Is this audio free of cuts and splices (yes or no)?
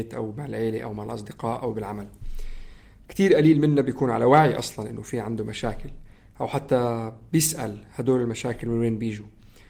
yes